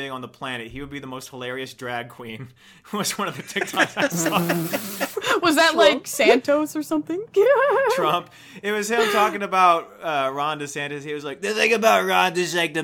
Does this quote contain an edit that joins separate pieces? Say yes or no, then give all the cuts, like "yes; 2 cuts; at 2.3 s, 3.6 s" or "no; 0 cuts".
no; 0 cuts